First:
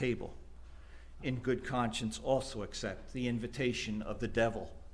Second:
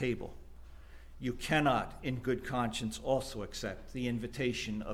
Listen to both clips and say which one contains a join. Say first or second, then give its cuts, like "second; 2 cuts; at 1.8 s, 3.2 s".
first; 1 cut; at 1.2 s